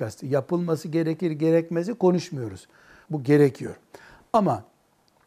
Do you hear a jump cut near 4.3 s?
no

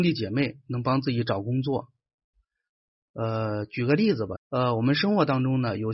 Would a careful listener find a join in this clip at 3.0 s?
no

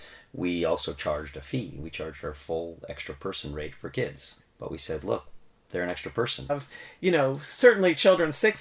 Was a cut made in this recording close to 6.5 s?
yes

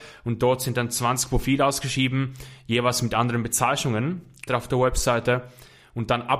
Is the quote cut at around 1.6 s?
no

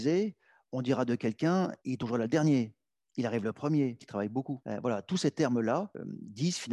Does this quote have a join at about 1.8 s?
yes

